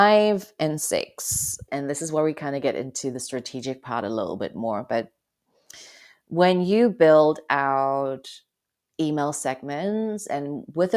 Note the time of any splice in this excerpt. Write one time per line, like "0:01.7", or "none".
0:01.7